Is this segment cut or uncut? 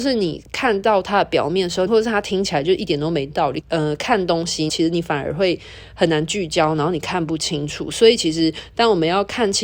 cut